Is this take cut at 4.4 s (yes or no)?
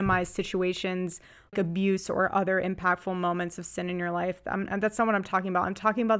no